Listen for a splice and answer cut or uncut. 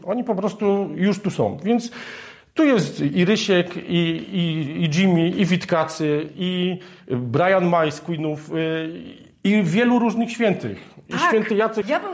uncut